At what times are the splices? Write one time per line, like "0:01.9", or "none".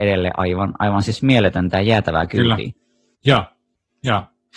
0:03.2